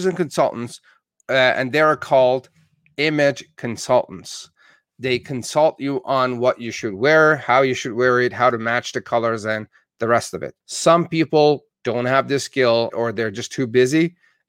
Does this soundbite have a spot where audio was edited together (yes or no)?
yes